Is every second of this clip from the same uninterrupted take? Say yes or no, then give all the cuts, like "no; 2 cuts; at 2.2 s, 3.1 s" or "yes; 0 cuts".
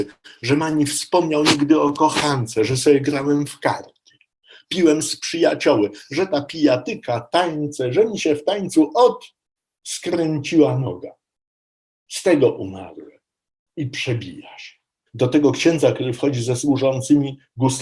no; 1 cut; at 15.1 s